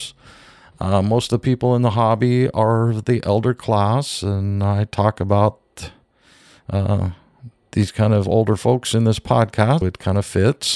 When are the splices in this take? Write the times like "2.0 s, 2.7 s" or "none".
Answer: 9.8 s